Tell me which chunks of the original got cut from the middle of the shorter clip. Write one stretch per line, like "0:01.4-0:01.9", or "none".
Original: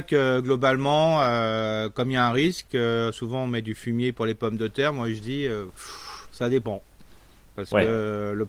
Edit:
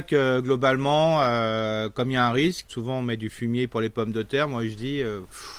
0:02.7-0:03.1